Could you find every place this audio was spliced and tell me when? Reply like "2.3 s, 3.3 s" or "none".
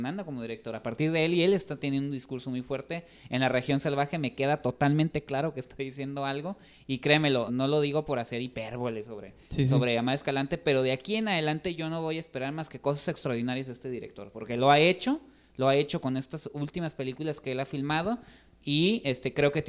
7.5 s